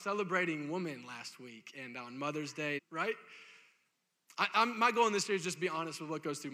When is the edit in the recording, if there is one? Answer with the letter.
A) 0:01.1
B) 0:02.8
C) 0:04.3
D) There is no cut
B